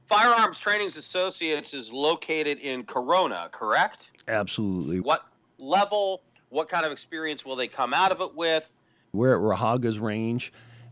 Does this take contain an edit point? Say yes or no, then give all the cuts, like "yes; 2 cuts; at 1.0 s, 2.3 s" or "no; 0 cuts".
yes; 2 cuts; at 5.0 s, 9.1 s